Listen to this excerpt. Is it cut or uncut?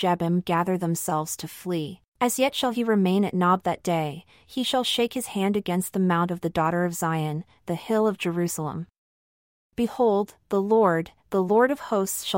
cut